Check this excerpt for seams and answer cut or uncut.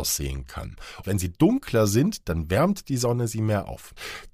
cut